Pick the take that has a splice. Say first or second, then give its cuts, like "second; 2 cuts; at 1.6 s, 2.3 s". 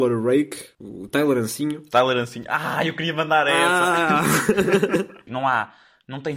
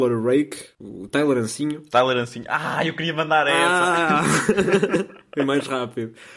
first; 1 cut; at 5.3 s